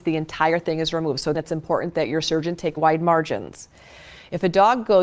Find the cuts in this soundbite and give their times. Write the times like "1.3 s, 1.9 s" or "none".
1.3 s, 2.8 s